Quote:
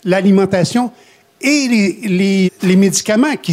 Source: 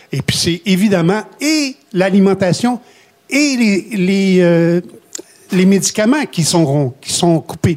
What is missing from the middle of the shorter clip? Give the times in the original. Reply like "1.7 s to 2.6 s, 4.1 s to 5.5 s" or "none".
4.3 s to 5.3 s